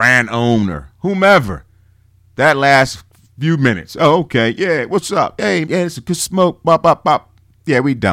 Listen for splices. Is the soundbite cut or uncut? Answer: cut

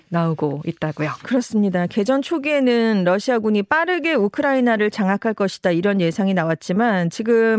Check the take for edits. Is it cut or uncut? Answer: uncut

